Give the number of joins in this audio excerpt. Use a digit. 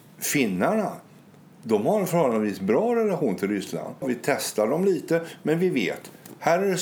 1